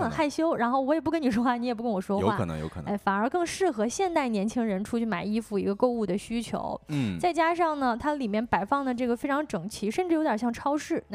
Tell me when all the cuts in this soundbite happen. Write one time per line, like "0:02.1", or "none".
none